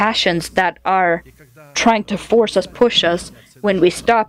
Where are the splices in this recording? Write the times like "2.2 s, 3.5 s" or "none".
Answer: none